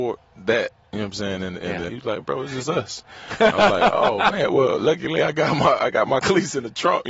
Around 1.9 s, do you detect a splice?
yes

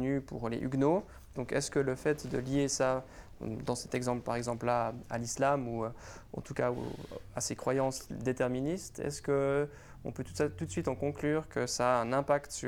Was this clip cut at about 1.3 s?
yes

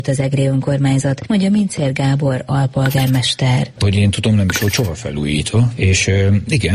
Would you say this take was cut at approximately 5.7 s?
yes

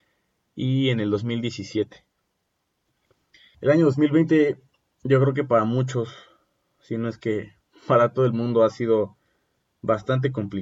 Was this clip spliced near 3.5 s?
yes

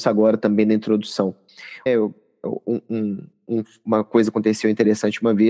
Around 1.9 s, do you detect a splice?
yes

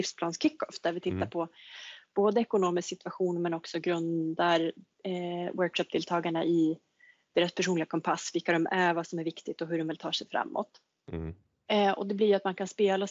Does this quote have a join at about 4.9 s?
no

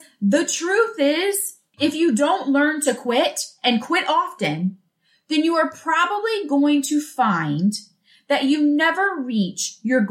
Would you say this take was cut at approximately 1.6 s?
no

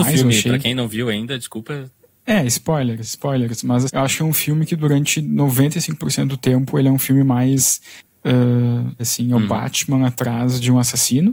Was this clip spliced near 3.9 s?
yes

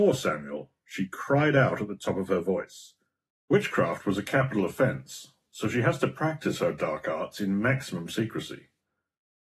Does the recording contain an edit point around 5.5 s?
no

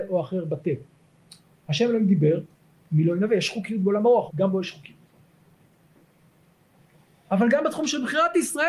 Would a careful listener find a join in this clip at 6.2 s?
no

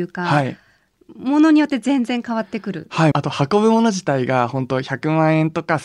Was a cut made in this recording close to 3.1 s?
yes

